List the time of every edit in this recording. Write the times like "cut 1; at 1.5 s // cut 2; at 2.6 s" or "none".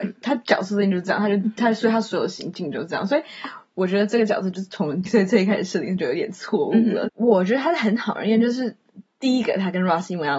cut 1; at 5.1 s // cut 2; at 7.1 s